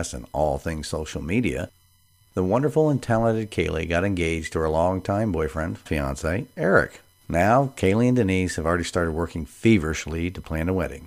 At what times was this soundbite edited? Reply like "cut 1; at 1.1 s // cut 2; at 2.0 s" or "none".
cut 1; at 5.9 s